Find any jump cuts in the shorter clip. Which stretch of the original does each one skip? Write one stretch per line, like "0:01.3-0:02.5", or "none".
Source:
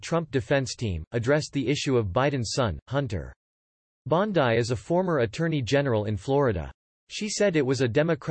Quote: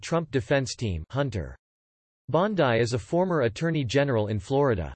0:01.1-0:02.8